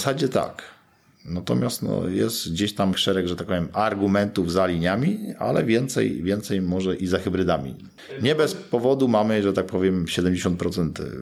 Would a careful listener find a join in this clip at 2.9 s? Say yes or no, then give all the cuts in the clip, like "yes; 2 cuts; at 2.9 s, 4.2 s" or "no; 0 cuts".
yes; 1 cut; at 2.9 s